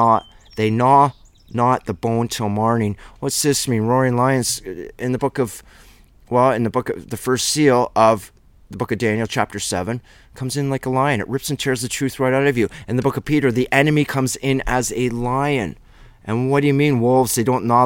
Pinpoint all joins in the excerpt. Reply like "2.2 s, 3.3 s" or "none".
none

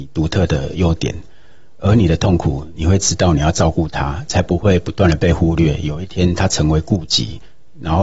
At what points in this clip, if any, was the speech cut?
none

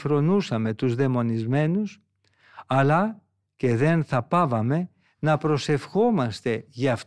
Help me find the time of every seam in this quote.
none

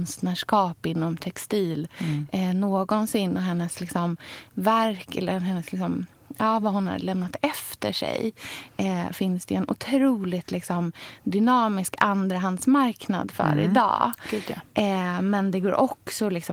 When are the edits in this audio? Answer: none

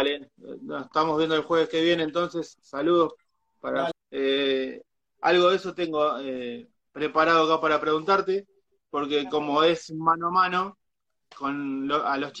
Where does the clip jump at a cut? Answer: 3.9 s

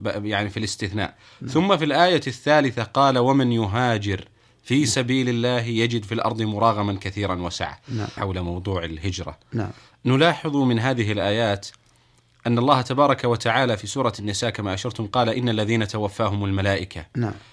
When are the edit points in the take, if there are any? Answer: 8.2 s

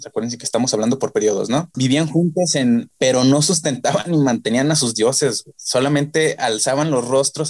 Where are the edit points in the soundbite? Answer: 1.7 s, 2.9 s

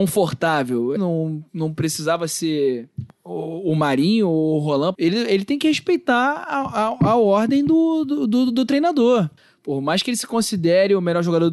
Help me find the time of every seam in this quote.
1.0 s, 4.9 s

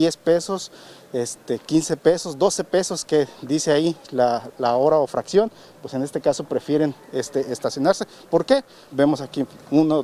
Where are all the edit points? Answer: 8.9 s

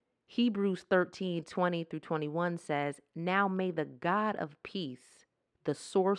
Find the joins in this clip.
none

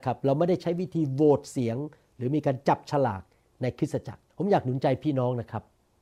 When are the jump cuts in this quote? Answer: 4.3 s

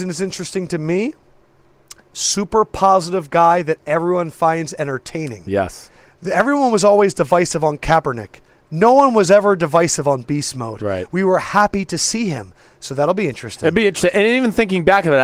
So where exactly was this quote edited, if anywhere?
none

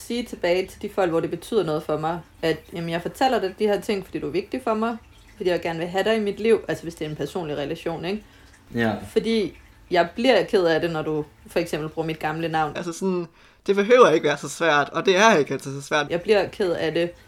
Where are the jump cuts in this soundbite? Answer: 12.8 s, 16.1 s

